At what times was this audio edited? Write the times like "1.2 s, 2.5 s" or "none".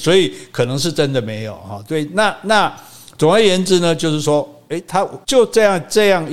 5.2 s